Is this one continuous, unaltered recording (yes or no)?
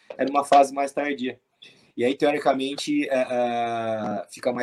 yes